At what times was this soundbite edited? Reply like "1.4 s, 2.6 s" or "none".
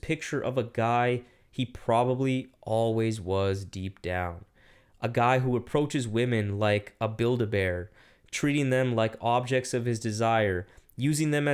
none